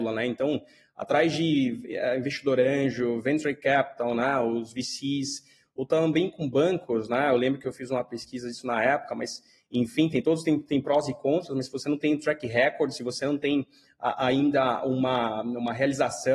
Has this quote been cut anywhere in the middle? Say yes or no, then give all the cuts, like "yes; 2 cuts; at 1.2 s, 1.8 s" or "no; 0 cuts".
no; 0 cuts